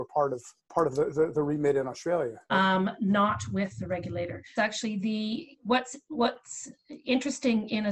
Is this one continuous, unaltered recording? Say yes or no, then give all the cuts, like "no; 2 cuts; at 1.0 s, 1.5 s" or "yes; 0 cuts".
no; 2 cuts; at 2.5 s, 4.6 s